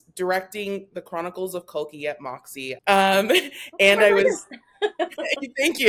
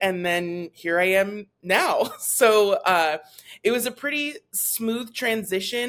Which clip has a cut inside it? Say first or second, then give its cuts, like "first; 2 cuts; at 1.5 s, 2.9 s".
first; 1 cut; at 2.8 s